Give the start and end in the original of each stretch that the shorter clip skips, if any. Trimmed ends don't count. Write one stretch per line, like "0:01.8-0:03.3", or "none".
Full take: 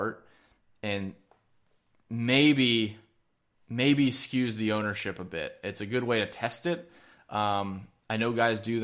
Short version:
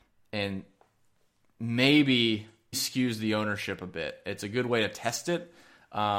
0:03.2-0:04.1